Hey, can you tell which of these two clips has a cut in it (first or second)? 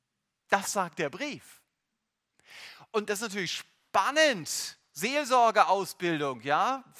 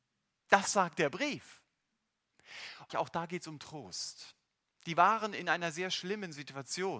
second